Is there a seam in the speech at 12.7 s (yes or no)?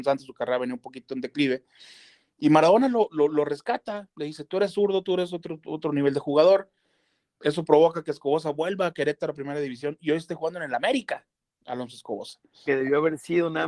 yes